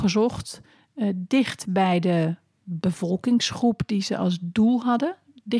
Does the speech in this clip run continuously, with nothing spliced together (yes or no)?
yes